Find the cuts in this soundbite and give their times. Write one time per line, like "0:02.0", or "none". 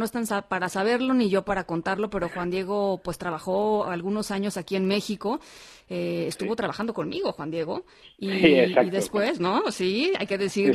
none